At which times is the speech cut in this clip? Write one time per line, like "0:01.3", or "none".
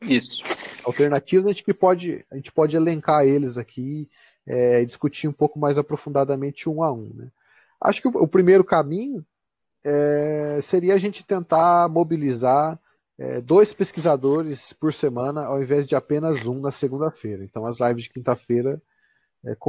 none